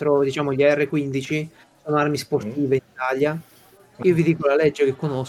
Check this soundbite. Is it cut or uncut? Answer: cut